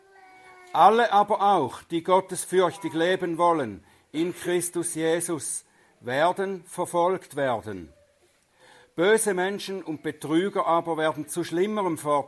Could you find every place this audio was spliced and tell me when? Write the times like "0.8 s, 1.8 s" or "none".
none